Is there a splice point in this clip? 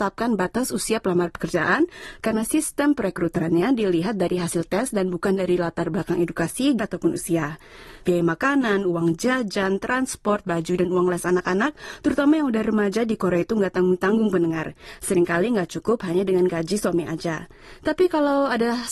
yes; 3 cuts; at 2.2 s, 6.8 s, 8.0 s

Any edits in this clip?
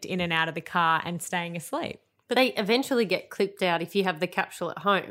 no; 0 cuts

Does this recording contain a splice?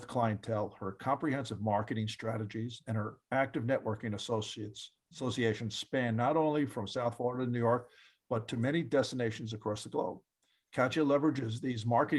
no; 0 cuts

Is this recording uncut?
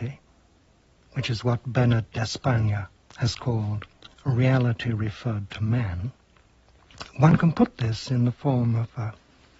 no; 1 cut; at 7.0 s

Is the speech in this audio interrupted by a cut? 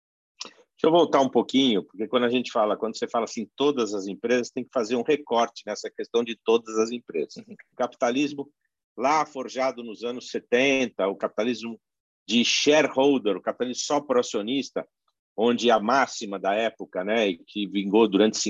yes; 1 cut; at 7.7 s

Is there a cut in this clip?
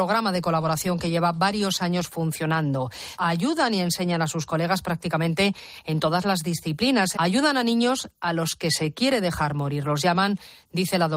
yes; 2 cuts; at 3.2 s, 7.1 s

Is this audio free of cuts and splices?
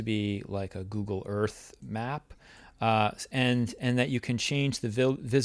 yes; 0 cuts

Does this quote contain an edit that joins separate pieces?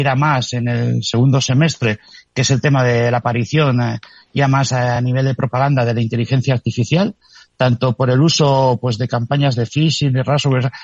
no; 0 cuts

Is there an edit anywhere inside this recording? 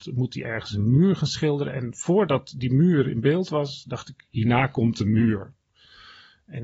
no; 0 cuts

